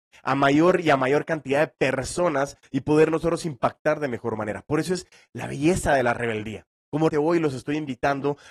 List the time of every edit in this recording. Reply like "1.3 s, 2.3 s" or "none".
7.1 s

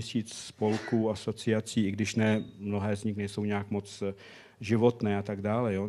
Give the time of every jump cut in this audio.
none

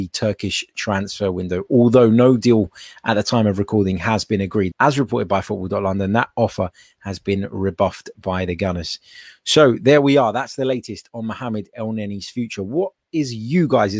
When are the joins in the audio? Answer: 4.7 s

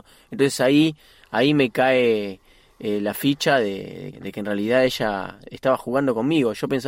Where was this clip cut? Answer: 4.1 s

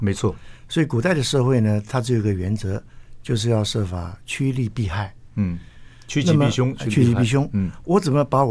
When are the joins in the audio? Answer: none

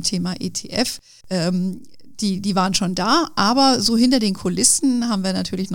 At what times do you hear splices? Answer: 1.2 s

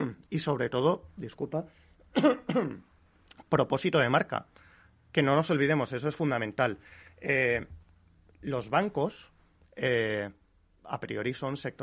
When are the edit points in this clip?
none

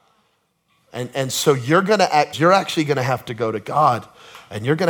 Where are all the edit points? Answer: 2.3 s

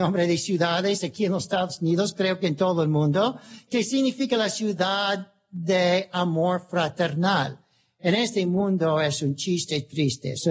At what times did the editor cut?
none

